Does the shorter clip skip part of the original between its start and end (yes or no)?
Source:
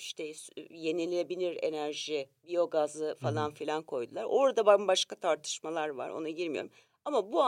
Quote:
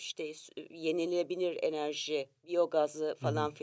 no